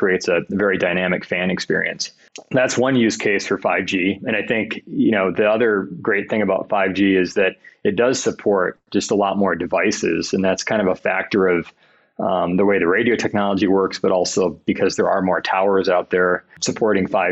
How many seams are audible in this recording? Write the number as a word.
zero